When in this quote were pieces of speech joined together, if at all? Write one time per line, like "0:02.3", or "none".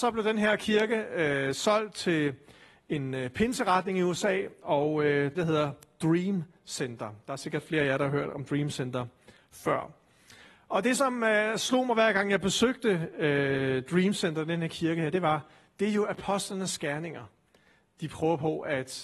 0:05.3